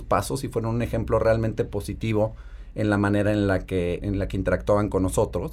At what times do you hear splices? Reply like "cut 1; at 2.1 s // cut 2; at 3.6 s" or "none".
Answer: cut 1; at 4.0 s